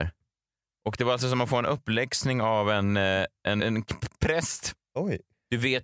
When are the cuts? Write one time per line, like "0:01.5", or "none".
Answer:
0:03.6
0:04.8

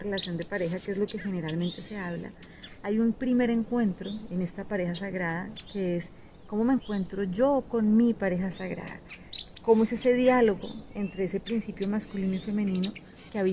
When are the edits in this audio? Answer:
none

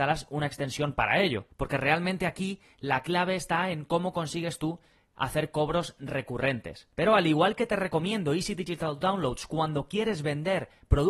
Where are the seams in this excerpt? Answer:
none

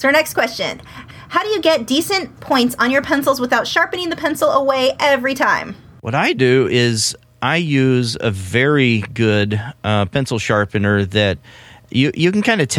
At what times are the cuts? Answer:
none

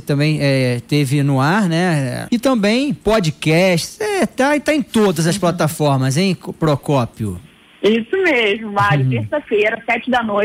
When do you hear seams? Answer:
0:02.3

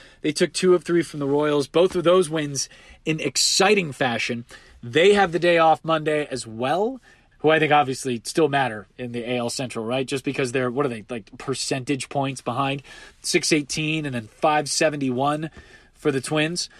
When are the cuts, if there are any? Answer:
0:07.3

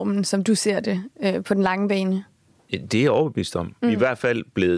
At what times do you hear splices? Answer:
0:03.8

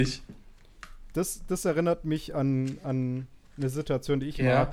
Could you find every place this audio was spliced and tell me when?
none

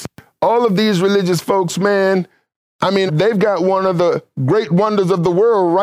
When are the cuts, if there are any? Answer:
0:03.1

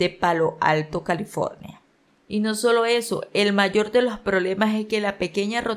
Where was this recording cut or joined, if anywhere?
0:02.1

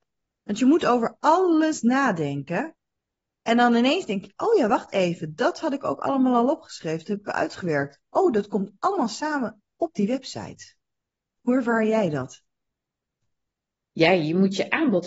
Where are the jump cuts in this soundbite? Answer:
none

